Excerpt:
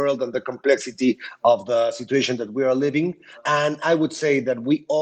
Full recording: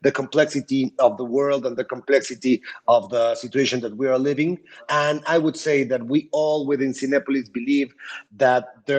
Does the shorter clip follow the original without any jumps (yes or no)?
yes